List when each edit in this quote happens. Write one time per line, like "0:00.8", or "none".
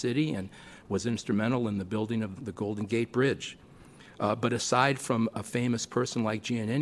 0:02.4